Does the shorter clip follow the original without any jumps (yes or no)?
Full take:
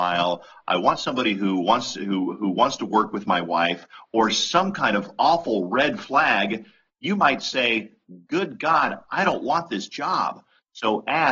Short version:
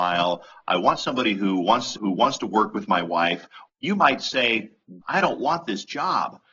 no